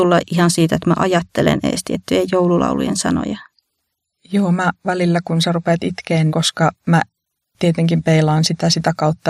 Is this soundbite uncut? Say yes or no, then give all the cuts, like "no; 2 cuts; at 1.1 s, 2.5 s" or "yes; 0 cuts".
no; 1 cut; at 6.3 s